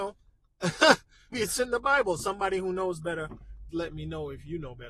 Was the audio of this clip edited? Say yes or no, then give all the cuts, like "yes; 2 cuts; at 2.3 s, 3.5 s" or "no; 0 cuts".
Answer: yes; 2 cuts; at 1.3 s, 3.7 s